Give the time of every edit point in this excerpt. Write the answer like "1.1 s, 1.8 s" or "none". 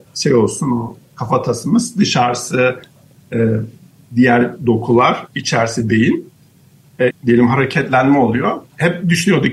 7.1 s